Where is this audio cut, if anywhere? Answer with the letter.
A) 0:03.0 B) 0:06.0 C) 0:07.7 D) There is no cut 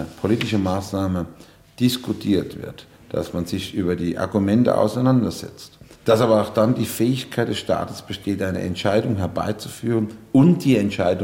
D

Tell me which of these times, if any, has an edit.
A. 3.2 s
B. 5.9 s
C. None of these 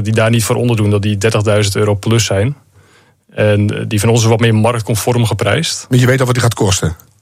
C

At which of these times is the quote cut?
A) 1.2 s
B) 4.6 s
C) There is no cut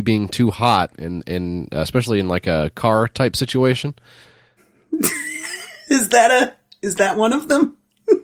B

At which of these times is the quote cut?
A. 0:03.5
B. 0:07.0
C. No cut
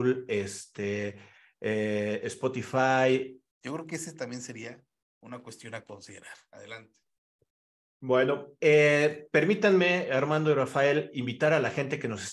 A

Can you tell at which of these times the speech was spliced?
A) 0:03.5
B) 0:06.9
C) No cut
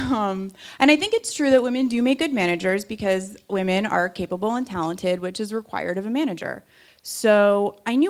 B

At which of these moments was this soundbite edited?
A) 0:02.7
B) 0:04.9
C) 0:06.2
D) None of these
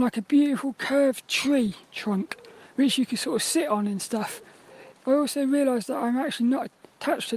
B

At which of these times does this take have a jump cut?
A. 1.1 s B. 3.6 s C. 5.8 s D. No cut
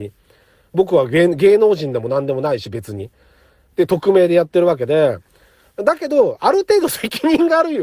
D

